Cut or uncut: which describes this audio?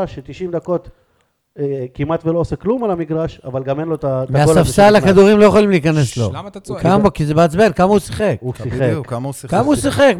uncut